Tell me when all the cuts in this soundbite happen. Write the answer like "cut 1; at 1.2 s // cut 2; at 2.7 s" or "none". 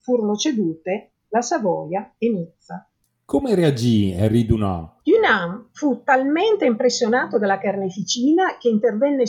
cut 1; at 5.0 s

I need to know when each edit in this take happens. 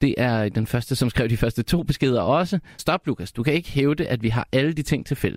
cut 1; at 2.8 s

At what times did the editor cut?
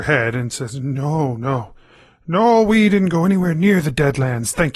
none

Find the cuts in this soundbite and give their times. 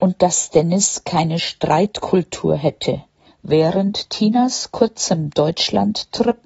cut 1; at 3.3 s

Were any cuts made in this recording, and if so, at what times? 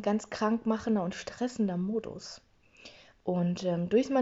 none

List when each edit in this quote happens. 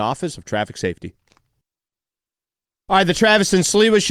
none

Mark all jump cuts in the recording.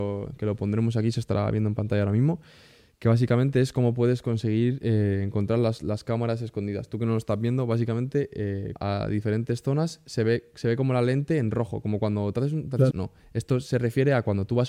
cut 1; at 8.8 s // cut 2; at 12.9 s

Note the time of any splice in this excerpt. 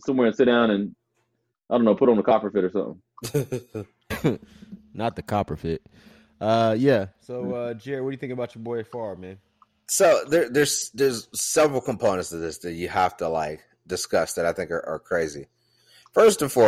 none

